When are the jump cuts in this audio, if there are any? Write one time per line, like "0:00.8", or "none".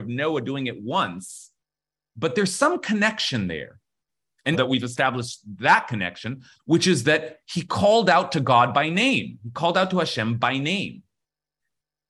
0:04.5
0:06.6